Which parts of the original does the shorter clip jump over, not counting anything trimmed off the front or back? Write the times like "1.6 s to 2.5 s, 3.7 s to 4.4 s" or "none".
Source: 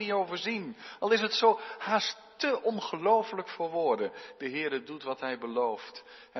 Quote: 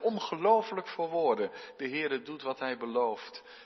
none